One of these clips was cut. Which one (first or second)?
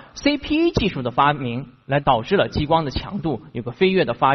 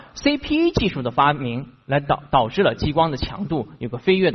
first